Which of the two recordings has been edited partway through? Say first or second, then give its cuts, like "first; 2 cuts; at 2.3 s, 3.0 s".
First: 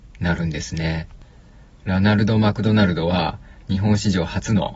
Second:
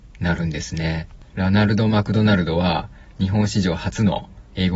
second; 1 cut; at 1.3 s